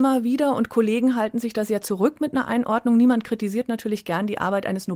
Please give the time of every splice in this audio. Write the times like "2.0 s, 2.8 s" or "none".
none